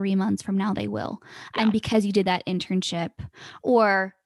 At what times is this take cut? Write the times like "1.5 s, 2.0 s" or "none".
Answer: none